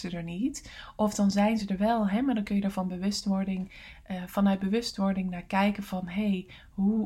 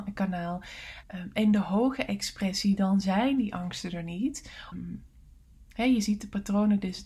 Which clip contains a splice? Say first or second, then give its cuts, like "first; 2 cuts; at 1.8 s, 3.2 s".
second; 2 cuts; at 1.0 s, 4.7 s